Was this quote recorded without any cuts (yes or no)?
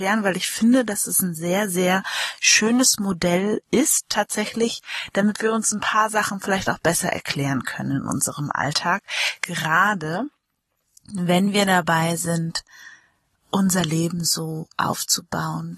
yes